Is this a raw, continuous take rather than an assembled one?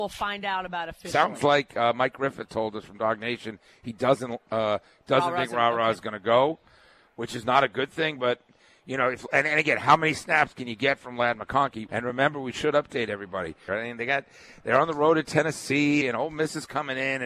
no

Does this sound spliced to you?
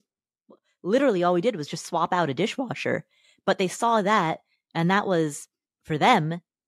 no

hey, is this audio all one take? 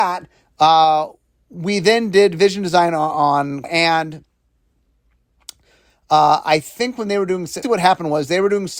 no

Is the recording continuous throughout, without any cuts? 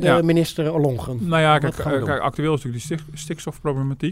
yes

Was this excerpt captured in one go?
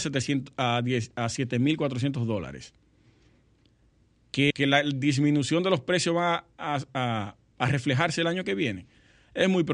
no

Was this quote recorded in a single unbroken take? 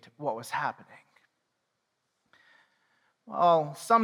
yes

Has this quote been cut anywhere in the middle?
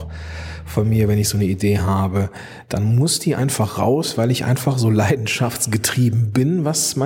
no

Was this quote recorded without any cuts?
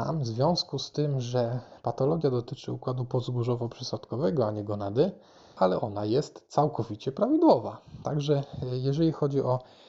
no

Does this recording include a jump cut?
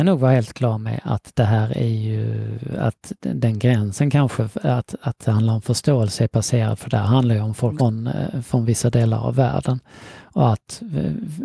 yes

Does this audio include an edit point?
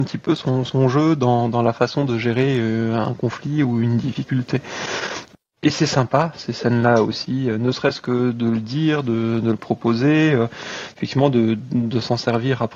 yes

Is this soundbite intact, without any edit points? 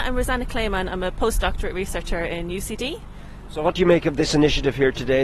no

